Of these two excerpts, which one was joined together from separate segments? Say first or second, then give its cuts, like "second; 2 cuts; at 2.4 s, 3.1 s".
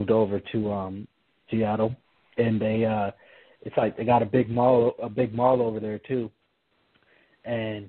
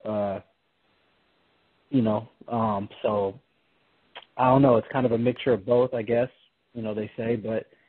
first; 1 cut; at 1.5 s